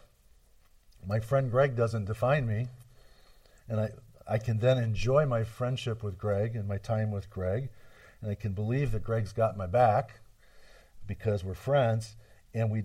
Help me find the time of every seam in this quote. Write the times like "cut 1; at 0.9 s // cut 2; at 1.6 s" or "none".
none